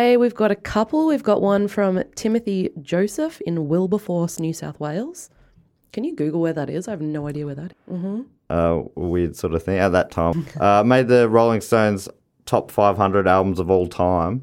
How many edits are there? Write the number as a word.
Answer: two